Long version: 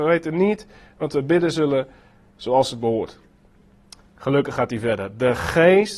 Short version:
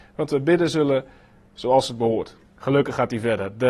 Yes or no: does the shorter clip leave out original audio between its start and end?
yes